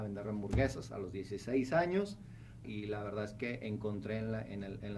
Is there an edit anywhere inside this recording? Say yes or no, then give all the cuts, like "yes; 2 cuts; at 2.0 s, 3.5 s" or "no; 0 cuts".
yes; 1 cut; at 2.6 s